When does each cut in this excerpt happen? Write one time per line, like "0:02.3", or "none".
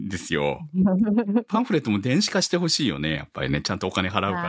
none